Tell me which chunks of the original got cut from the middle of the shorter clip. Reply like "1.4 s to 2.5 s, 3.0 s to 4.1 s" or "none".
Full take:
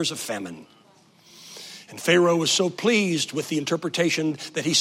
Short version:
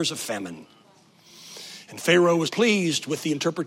2.5 s to 2.7 s